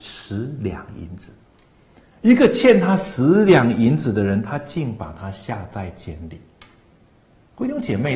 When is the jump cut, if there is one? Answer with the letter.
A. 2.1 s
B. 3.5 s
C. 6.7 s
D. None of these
D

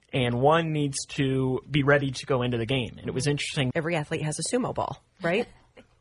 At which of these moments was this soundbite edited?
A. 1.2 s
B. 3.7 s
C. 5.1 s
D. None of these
B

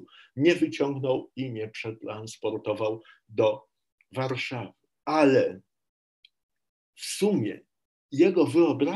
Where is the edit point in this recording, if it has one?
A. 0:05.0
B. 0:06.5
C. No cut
A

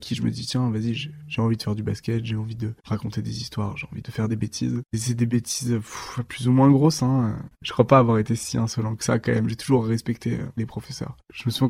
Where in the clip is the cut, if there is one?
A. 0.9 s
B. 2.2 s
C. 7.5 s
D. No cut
C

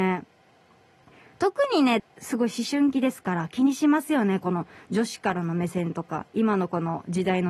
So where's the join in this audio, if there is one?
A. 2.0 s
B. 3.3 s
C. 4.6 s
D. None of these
A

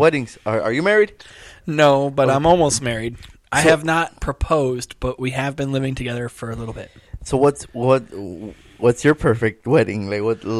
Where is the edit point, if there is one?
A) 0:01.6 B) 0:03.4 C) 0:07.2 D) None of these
D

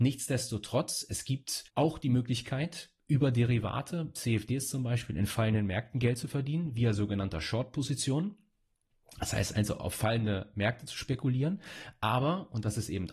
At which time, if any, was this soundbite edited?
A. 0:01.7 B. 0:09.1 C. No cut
A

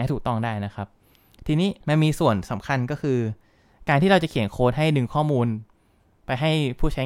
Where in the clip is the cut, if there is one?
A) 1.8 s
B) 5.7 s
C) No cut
A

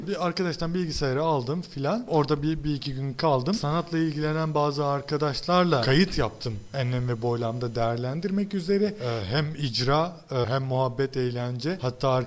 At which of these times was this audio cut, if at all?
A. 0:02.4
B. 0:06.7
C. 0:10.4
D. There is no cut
C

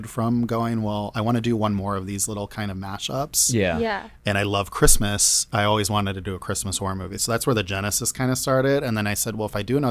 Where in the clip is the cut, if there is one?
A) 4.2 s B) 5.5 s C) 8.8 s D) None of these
D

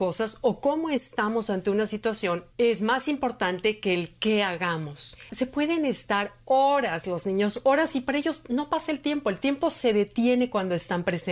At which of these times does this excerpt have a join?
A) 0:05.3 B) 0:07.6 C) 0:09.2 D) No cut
A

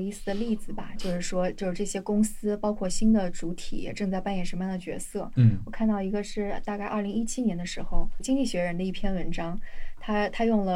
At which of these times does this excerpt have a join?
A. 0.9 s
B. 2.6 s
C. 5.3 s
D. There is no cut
D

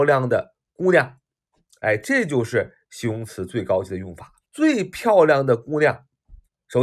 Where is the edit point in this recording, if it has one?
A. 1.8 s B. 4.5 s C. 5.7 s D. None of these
B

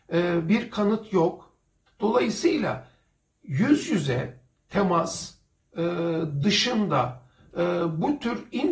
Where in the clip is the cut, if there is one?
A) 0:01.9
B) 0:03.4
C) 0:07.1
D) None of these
A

